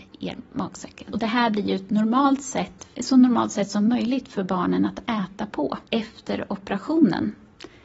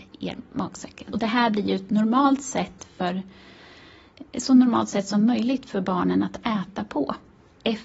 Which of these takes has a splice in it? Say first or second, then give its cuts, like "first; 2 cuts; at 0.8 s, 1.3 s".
first; 2 cuts; at 2.9 s, 5.9 s